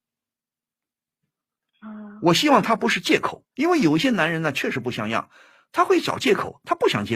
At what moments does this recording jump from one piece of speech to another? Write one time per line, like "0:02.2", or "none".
0:03.5